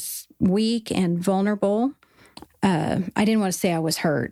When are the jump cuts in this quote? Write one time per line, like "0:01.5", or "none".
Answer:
0:02.5